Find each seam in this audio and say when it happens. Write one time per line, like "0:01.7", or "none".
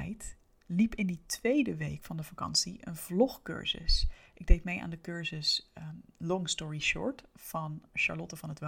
none